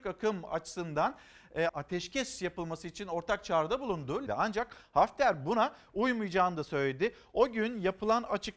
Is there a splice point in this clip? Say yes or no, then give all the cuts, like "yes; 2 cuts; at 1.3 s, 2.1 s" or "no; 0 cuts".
yes; 2 cuts; at 1.7 s, 4.3 s